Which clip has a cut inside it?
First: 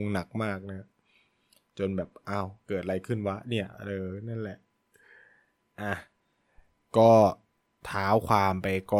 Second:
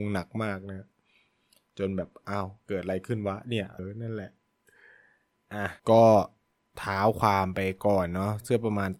second; 2 cuts; at 3.8 s, 5.8 s

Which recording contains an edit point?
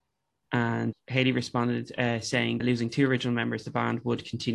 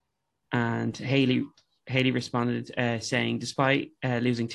first; 2 cuts; at 0.9 s, 2.6 s

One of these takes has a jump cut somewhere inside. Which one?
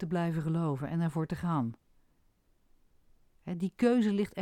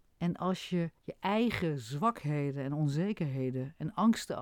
second; 1 cut; at 1.0 s

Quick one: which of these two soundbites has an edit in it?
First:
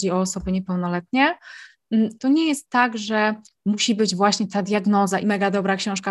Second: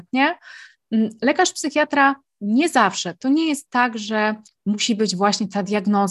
first; 2 cuts; at 2.2 s, 5.2 s

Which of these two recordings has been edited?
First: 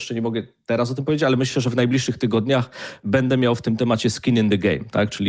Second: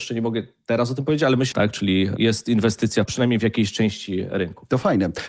second; 2 cuts; at 1.5 s, 3.1 s

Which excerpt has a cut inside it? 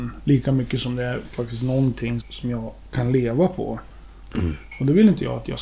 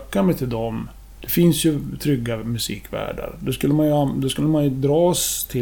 first; 2 cuts; at 2.2 s, 4.3 s

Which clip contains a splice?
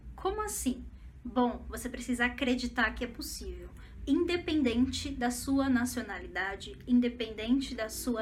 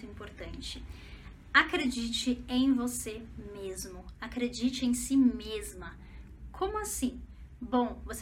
first; 1 cut; at 4.0 s

